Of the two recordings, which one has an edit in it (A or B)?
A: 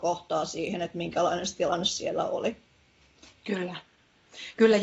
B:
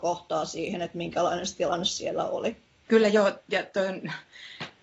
B